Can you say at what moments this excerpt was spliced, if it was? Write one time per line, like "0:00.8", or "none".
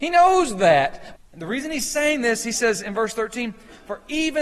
0:01.2